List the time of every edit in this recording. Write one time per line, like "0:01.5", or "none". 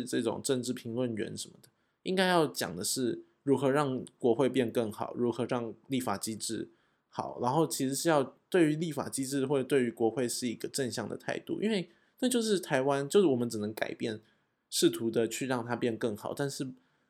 none